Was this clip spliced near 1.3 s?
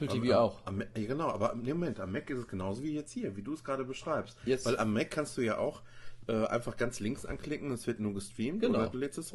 no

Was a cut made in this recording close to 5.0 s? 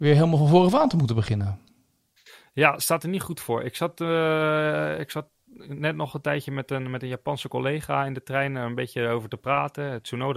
no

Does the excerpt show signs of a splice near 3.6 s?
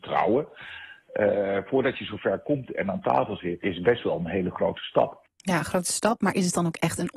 yes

